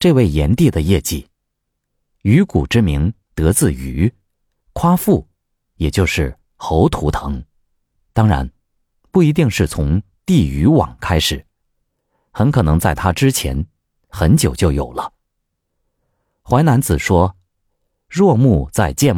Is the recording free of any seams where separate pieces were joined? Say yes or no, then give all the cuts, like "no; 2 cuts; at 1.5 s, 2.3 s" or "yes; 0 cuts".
yes; 0 cuts